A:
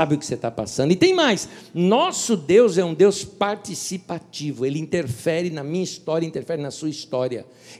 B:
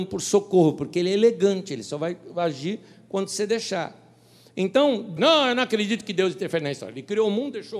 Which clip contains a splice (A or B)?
B